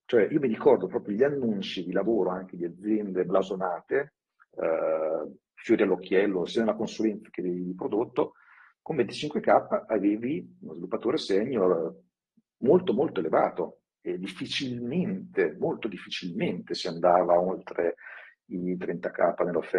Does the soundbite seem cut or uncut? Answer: uncut